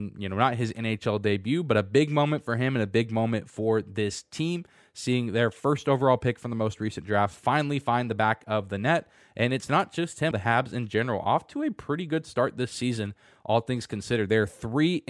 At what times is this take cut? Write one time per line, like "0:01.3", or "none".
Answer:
0:10.3